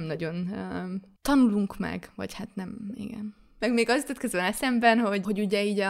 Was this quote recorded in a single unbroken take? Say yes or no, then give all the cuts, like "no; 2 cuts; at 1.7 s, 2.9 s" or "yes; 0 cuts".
yes; 0 cuts